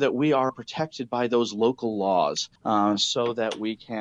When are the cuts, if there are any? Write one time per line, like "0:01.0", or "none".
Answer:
0:02.6